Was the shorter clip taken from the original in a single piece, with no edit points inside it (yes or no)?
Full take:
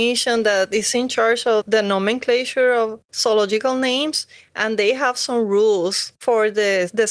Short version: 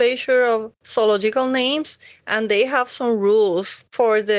yes